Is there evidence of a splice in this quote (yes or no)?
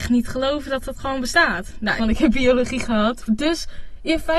yes